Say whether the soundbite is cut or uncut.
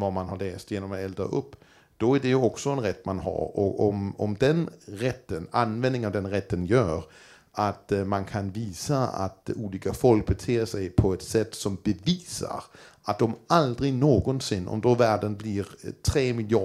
uncut